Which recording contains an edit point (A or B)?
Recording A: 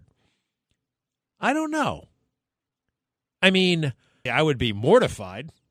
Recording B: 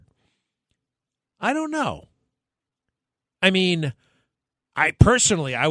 A